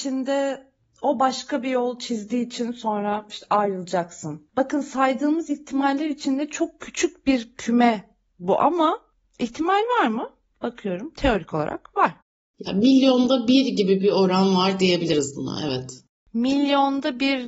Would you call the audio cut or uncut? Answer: uncut